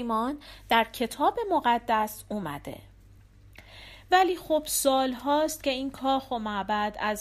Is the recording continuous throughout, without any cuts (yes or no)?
no